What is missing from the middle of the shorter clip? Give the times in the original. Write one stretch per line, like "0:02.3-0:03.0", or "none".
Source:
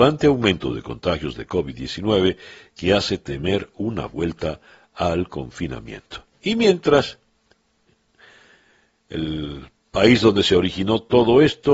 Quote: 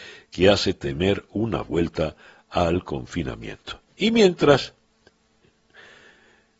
none